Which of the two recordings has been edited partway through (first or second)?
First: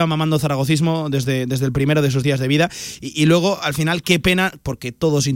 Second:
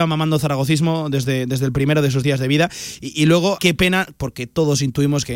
second